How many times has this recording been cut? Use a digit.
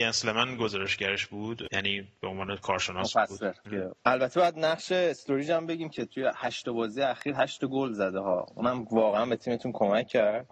1